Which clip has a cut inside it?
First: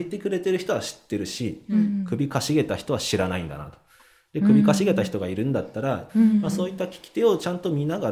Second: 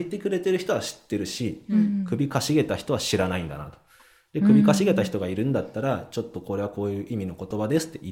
first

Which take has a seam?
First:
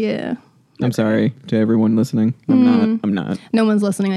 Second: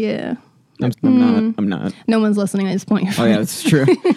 second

